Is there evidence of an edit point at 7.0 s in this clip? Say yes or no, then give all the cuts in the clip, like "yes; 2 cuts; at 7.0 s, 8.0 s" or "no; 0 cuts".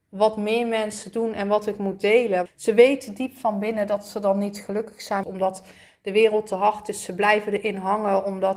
no; 2 cuts; at 2.5 s, 5.2 s